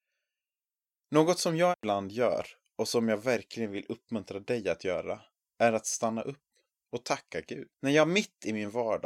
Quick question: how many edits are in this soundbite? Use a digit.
1